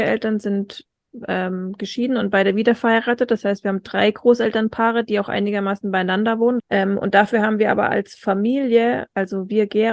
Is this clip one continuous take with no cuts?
no; 1 cut; at 6.6 s

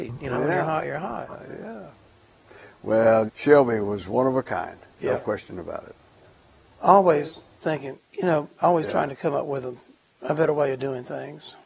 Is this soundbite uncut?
no; 2 cuts; at 3.3 s, 7.6 s

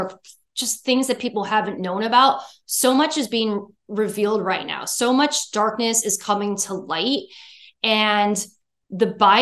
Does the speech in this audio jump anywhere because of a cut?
no; 0 cuts

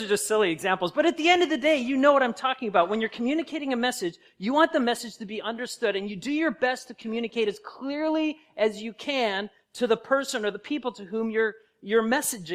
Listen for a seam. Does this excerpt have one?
no; 0 cuts

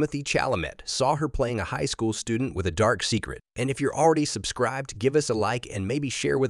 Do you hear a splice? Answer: yes; 1 cut; at 3.5 s

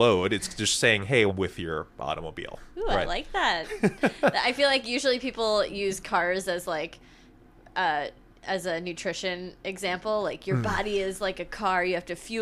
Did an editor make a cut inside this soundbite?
yes; 1 cut; at 1.3 s

